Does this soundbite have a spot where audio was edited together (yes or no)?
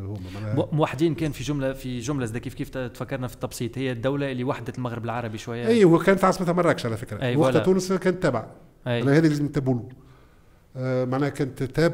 no